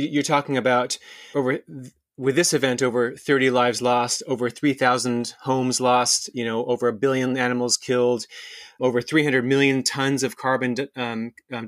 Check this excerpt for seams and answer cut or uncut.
cut